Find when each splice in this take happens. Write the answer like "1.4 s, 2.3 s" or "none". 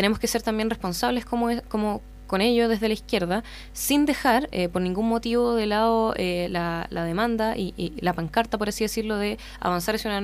none